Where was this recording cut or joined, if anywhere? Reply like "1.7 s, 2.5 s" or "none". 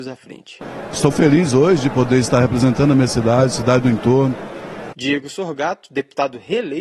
1.1 s, 4.9 s

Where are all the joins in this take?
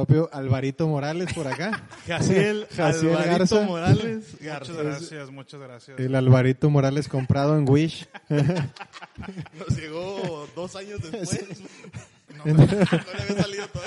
12.3 s

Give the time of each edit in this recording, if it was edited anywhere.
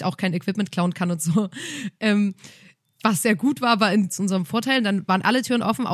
4.1 s

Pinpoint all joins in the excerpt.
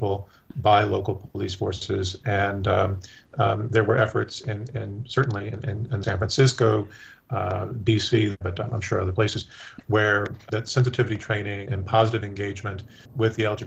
6.0 s, 8.4 s, 11.7 s

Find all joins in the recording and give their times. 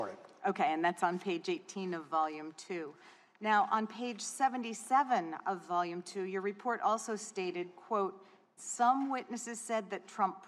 8.6 s

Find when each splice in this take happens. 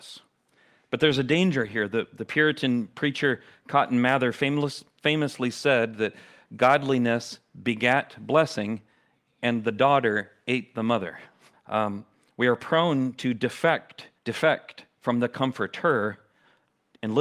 11.5 s, 14.2 s

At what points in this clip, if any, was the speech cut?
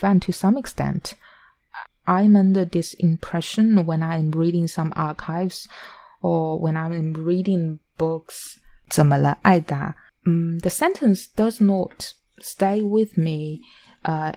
1.9 s, 8.9 s, 10.1 s

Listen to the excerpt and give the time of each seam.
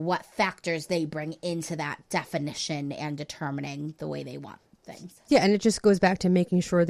none

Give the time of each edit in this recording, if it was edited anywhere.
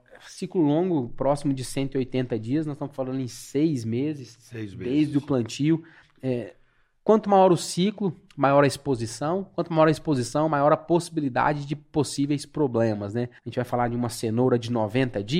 13.4 s

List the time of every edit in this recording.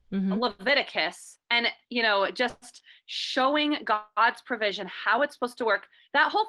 none

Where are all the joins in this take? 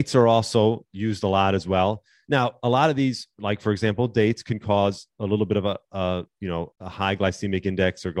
6.7 s

